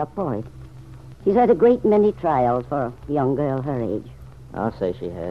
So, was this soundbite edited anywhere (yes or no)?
yes